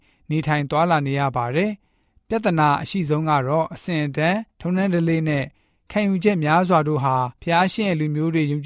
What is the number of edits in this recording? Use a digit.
2